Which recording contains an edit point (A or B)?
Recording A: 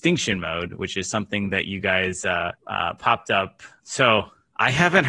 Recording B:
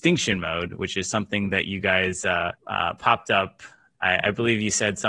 A